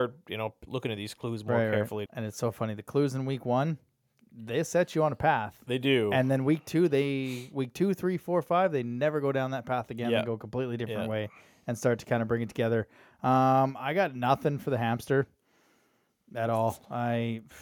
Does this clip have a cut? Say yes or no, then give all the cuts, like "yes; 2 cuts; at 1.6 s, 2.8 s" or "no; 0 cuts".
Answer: yes; 1 cut; at 2.1 s